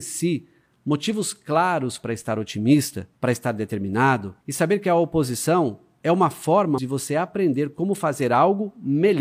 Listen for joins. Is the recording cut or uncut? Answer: cut